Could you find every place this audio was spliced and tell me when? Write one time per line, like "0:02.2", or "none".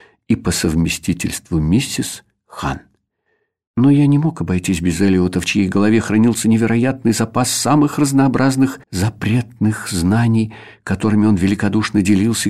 0:03.7
0:08.8